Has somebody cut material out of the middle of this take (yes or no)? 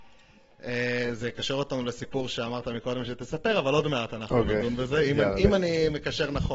no